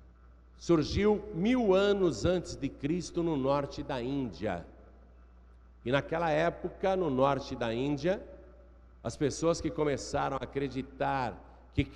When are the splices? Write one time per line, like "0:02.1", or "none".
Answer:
none